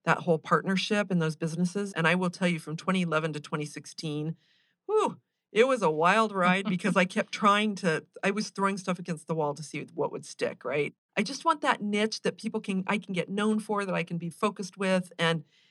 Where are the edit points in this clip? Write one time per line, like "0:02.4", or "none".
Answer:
0:01.9
0:11.1
0:14.3